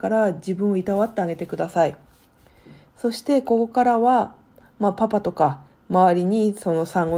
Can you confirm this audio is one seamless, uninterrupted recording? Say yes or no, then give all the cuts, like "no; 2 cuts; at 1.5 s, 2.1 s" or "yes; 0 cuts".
yes; 0 cuts